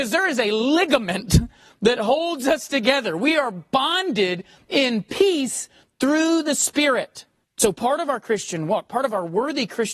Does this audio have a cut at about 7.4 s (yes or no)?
yes